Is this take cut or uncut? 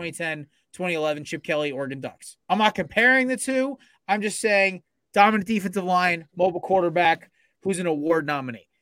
cut